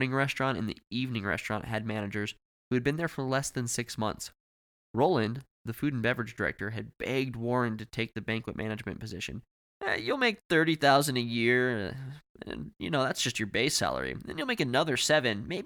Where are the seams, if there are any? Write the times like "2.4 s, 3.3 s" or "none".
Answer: none